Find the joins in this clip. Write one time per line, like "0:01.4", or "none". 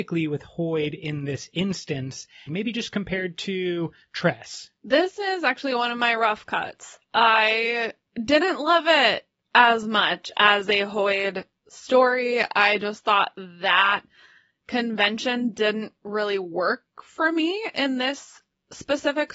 0:02.5